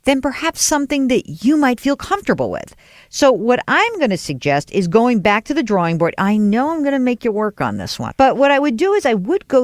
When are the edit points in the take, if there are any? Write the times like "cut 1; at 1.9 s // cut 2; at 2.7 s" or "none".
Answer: cut 1; at 8.1 s